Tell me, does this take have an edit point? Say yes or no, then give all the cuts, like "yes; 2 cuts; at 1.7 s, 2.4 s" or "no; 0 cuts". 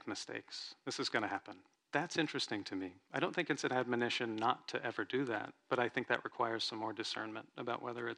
yes; 1 cut; at 1.8 s